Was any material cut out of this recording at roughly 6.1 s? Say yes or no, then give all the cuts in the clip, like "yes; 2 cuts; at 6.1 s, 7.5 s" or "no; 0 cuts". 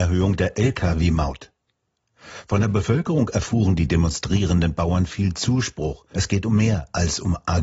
yes; 1 cut; at 6.1 s